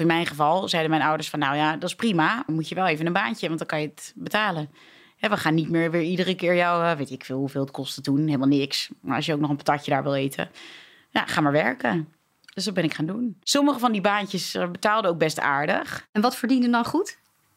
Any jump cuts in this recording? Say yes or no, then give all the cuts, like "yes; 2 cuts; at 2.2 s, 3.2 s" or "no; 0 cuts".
yes; 1 cut; at 2.5 s